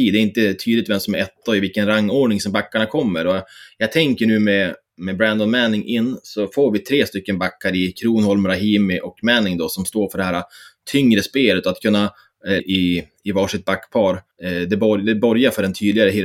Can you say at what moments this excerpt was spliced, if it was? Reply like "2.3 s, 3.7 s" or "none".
12.6 s, 14.3 s